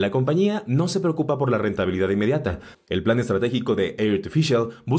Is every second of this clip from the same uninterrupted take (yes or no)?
no